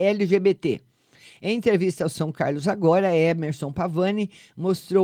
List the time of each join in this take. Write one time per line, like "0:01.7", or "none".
none